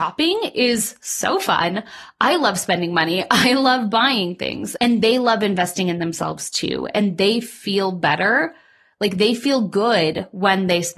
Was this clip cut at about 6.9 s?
no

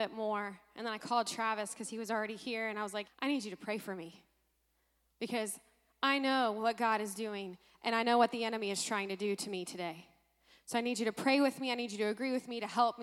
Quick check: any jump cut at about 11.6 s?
no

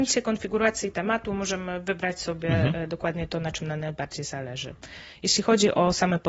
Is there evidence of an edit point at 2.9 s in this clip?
no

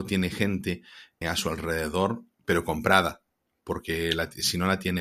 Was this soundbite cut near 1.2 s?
yes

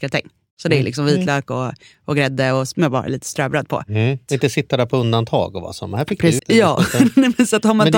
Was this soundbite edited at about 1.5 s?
no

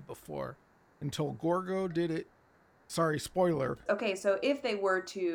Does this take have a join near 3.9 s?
yes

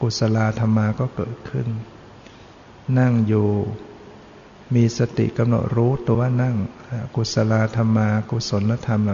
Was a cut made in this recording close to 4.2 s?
no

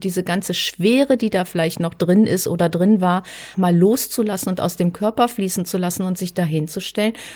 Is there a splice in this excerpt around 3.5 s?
yes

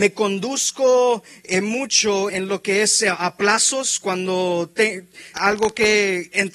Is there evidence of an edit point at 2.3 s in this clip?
yes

